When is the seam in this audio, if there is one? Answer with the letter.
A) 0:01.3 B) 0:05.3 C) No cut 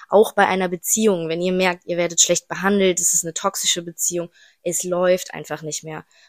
C